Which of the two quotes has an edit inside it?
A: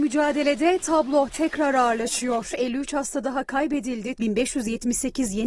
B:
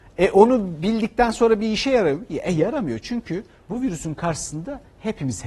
A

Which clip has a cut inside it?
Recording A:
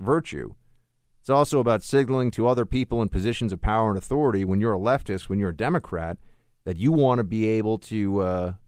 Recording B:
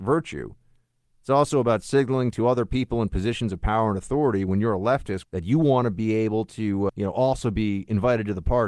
B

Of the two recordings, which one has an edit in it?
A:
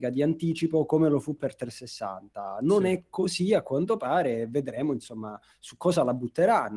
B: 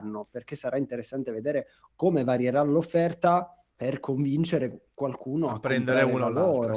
B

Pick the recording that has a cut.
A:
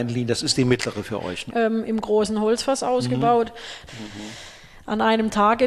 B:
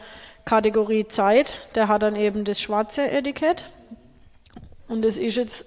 A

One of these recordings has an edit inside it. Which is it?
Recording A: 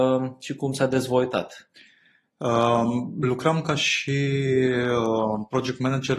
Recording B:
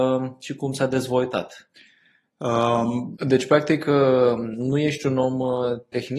B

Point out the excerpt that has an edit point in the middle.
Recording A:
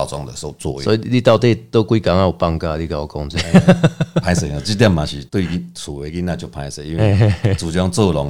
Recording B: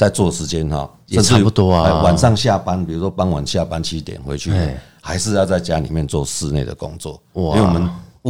A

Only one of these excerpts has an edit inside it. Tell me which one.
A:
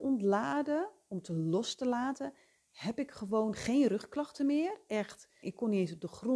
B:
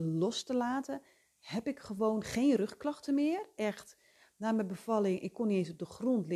A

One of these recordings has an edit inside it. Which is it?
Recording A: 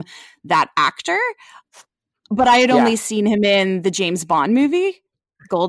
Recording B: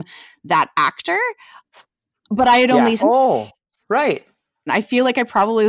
B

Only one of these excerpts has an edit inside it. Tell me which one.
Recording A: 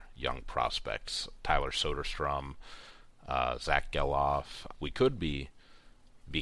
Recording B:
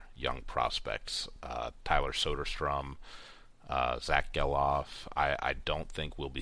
A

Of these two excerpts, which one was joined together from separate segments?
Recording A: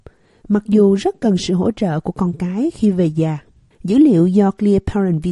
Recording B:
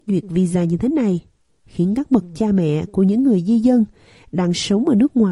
A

